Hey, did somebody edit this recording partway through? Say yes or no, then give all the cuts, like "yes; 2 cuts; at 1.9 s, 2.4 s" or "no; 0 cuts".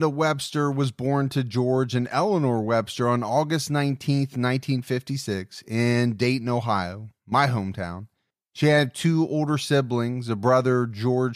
no; 0 cuts